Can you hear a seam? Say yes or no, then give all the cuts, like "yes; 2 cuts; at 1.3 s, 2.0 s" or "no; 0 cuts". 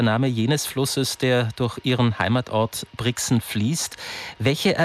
no; 0 cuts